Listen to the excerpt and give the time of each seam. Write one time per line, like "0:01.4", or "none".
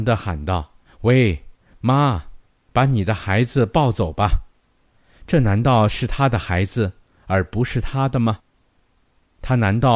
none